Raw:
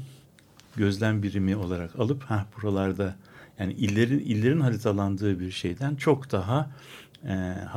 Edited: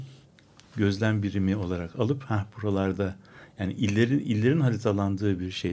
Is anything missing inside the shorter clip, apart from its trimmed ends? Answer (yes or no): no